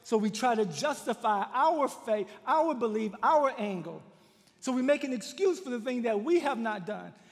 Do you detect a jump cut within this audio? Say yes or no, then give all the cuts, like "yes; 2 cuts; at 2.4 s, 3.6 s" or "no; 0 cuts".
no; 0 cuts